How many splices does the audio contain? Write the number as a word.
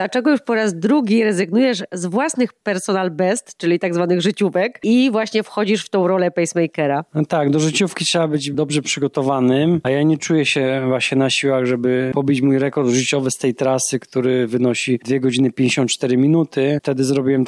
zero